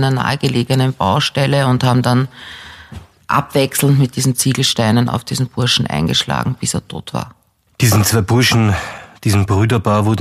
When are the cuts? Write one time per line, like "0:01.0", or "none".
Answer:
none